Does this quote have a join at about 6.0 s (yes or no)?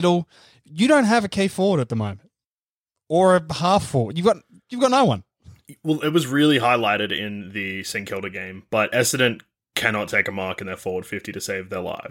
no